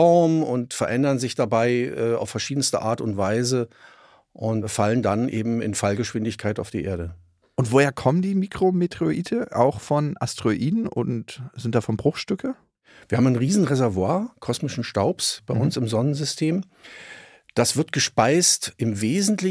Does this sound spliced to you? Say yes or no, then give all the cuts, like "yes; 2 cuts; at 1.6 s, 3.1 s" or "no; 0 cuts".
no; 0 cuts